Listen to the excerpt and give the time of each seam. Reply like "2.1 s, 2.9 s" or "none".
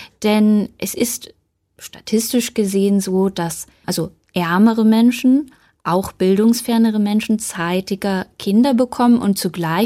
none

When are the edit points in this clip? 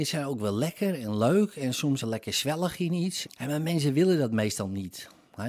2.0 s, 3.2 s

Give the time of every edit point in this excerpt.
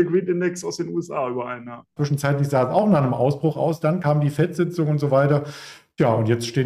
2.0 s

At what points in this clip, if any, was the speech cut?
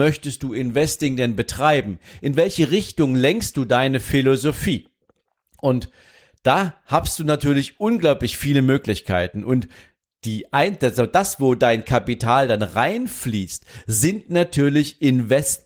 none

